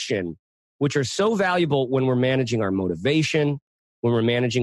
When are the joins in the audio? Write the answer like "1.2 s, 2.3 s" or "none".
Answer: none